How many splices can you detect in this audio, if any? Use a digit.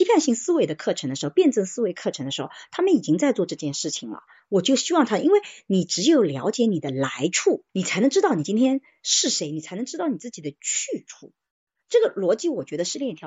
1